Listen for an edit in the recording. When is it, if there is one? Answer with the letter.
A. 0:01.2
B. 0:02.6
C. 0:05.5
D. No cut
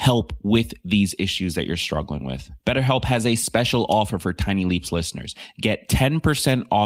B